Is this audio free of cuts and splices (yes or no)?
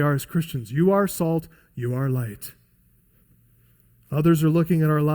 yes